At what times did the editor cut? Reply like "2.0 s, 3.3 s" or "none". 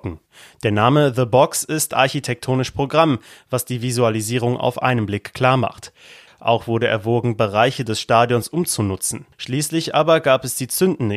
6.3 s, 9.3 s